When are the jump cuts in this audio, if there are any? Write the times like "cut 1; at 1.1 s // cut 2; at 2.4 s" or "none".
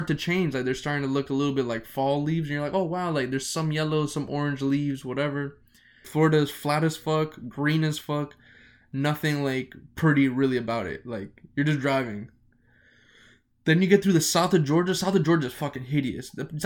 cut 1; at 6.0 s